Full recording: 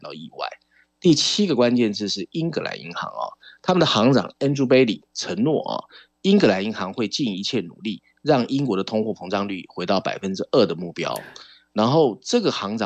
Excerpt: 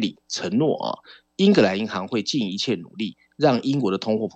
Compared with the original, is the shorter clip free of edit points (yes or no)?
yes